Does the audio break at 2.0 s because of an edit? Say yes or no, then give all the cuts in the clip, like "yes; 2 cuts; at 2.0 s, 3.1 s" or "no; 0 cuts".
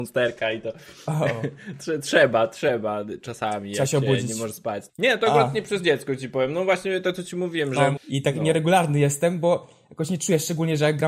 no; 2 cuts; at 4.9 s, 8.0 s